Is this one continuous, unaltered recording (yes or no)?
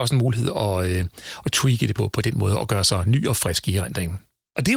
yes